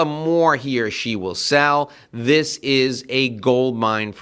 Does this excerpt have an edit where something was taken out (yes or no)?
no